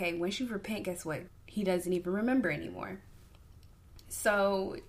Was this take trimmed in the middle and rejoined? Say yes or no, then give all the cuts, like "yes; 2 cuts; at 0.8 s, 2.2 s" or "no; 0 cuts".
yes; 1 cut; at 1.3 s